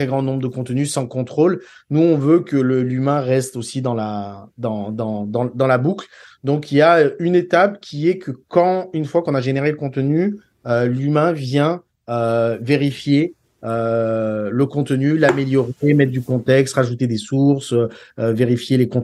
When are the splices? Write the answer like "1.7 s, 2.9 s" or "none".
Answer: none